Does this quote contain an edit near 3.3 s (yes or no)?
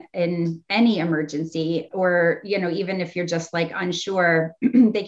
no